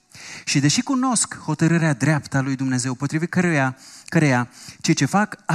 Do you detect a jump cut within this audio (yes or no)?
no